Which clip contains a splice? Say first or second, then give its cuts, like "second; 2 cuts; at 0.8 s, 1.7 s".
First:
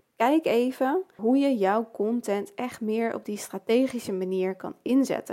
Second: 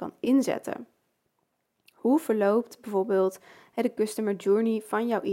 first; 1 cut; at 1.2 s